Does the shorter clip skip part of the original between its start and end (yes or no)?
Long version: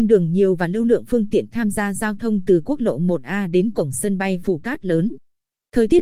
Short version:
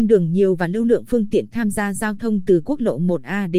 no